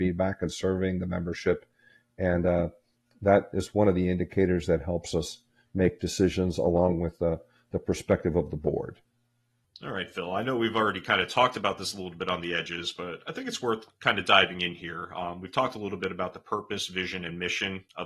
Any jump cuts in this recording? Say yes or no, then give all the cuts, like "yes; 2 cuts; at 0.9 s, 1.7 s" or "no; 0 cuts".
no; 0 cuts